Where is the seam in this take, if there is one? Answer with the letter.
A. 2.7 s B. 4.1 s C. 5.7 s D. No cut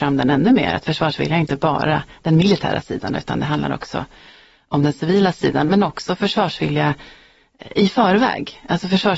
D